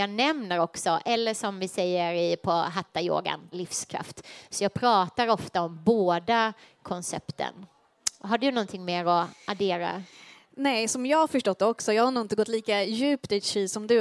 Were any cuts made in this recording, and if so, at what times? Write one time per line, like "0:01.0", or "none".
0:03.5